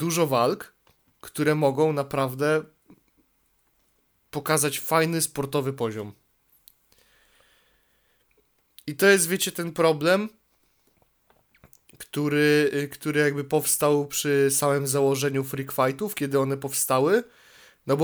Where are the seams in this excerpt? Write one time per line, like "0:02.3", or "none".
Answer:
none